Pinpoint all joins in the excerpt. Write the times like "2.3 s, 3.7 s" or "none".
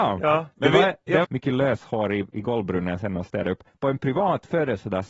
1.2 s, 3.7 s